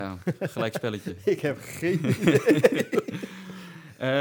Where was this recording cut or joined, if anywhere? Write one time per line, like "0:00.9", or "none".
none